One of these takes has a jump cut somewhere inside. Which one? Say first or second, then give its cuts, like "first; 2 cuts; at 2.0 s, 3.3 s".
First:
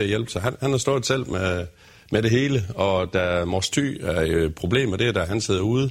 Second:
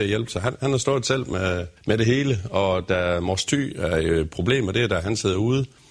second; 1 cut; at 1.8 s